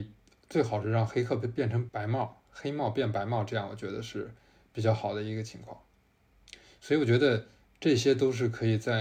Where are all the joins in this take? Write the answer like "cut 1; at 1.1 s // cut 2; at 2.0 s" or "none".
cut 1; at 1.9 s